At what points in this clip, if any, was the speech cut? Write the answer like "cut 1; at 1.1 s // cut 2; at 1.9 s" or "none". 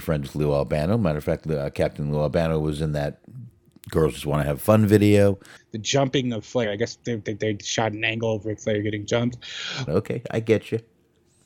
cut 1; at 5.6 s // cut 2; at 9.9 s